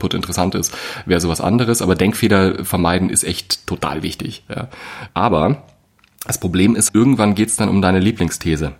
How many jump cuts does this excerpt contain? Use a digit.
2